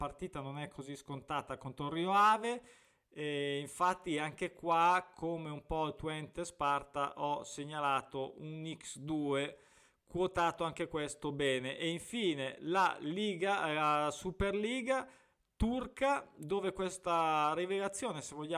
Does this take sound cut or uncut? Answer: uncut